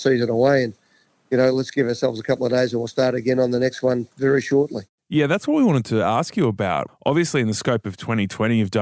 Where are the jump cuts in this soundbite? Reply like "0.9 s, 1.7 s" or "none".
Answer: 6.9 s